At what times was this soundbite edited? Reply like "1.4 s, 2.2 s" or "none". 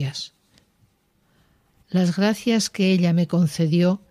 1.7 s